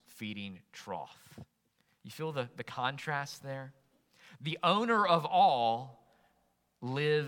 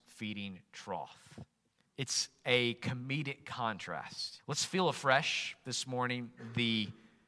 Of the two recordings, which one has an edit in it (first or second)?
second